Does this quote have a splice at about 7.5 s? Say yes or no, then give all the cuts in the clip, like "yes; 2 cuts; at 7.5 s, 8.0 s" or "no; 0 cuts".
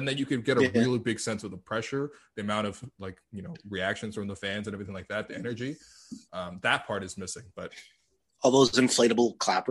no; 0 cuts